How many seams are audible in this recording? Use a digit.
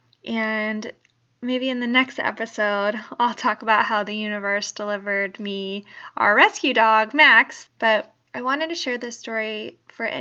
1